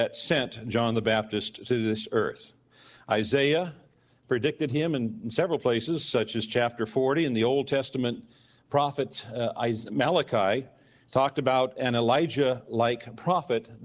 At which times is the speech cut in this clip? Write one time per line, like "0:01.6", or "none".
none